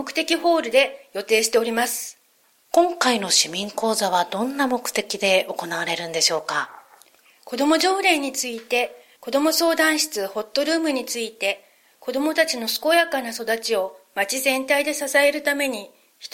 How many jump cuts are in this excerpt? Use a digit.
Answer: 2